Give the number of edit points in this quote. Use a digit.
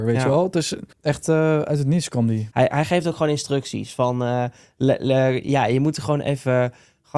2